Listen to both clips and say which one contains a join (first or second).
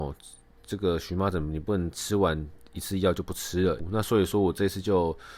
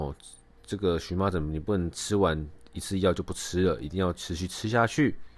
first